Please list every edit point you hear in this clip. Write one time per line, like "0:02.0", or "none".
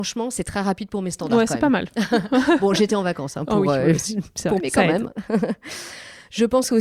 0:04.6